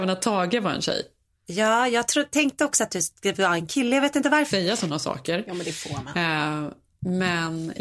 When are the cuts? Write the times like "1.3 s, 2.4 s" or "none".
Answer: 4.5 s